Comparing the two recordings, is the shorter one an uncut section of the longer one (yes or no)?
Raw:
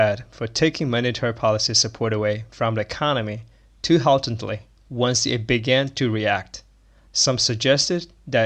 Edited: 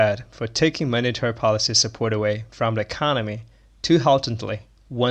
yes